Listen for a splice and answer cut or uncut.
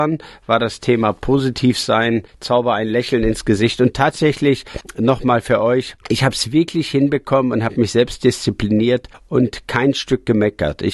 uncut